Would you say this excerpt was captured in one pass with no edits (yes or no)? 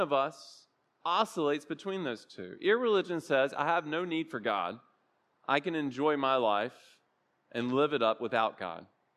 yes